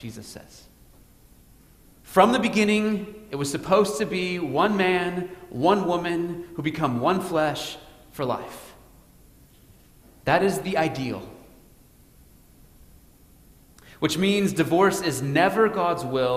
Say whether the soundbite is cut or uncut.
uncut